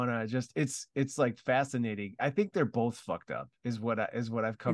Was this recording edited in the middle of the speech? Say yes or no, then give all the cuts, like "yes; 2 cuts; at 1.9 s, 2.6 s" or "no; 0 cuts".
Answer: no; 0 cuts